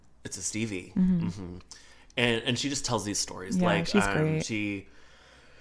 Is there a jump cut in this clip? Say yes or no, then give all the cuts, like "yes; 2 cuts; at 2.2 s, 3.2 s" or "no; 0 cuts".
no; 0 cuts